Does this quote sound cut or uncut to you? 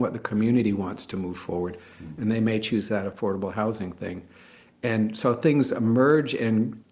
uncut